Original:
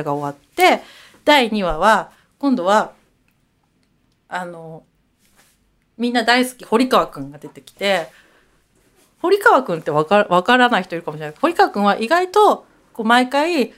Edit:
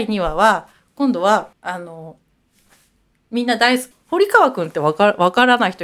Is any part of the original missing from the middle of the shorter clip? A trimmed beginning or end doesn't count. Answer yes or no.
yes